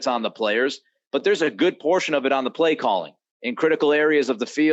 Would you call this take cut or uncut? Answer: uncut